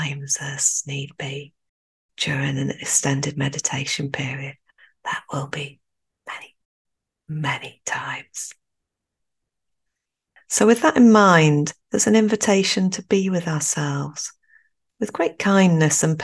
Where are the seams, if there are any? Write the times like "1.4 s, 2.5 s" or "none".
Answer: 6.1 s, 10.4 s, 11.8 s